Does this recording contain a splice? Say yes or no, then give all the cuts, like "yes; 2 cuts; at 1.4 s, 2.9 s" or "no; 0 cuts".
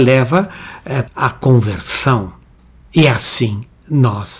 yes; 1 cut; at 1.1 s